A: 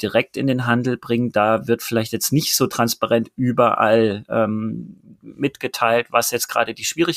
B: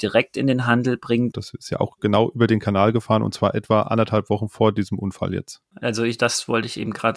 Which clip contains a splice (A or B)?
B